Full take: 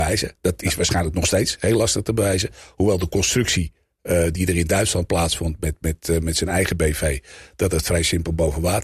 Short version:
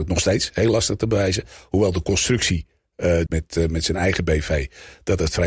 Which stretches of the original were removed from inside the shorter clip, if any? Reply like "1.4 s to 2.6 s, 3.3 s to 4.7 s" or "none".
4.3 s to 5.8 s